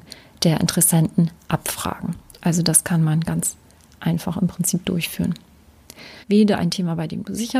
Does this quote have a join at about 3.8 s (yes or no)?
no